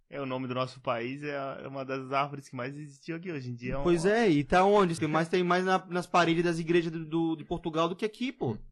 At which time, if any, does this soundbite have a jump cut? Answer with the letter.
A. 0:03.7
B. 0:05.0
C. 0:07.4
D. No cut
B